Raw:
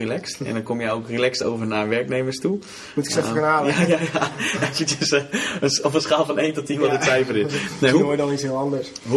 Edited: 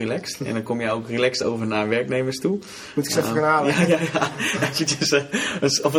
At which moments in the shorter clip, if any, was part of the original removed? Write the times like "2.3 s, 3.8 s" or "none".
none

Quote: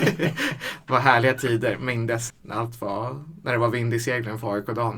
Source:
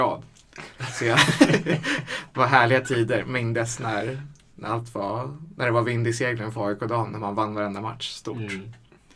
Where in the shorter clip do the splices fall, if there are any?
2.3 s

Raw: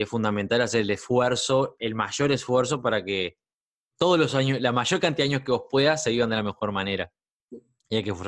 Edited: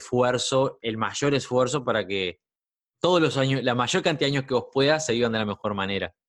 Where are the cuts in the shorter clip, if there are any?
none

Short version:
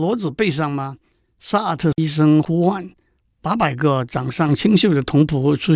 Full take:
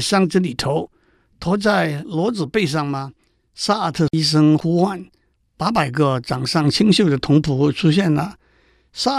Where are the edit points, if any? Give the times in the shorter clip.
none

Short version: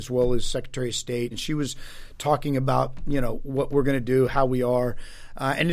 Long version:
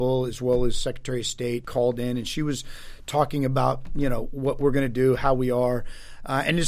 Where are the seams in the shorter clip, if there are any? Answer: 1.3 s

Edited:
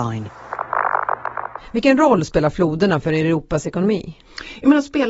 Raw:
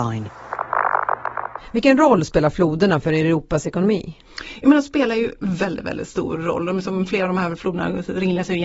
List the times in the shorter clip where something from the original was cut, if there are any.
none

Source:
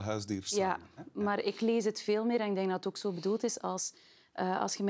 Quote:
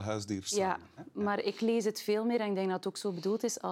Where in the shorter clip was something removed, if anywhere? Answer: none

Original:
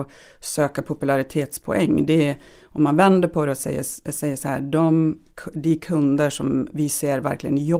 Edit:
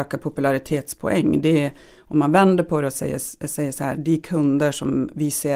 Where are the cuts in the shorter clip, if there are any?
3.9 s

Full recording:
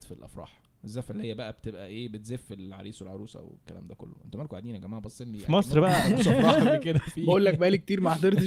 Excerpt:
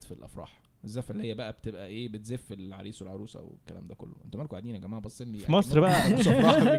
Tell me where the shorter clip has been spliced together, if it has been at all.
none

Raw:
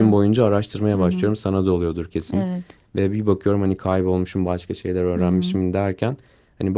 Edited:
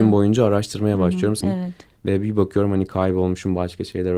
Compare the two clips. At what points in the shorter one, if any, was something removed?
1.4 s

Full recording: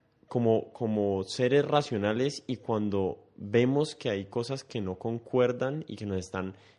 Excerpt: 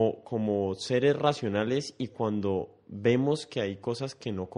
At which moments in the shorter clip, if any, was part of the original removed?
none

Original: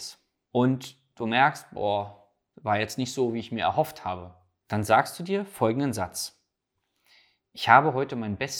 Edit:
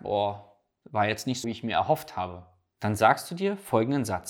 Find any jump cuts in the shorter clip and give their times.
1.4 s

